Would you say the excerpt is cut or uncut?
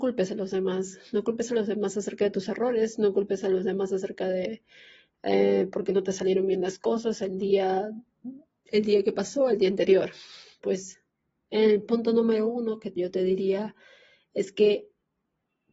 cut